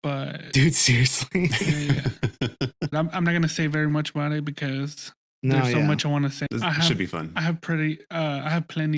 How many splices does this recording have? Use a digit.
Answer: 2